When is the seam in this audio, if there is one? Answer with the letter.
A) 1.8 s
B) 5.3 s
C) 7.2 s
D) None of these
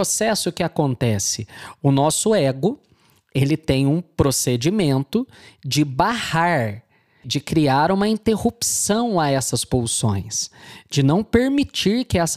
C